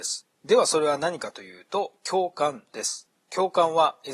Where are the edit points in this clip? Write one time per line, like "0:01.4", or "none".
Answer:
none